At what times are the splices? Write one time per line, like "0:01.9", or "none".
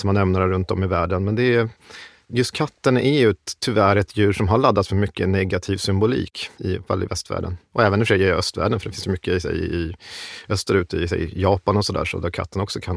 none